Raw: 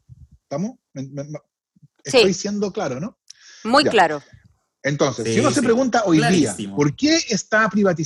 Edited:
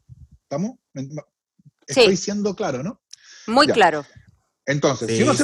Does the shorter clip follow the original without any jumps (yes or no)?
no